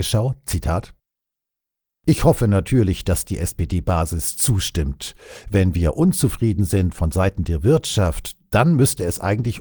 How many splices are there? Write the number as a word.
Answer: zero